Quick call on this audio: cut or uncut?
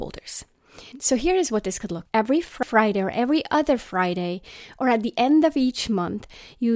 cut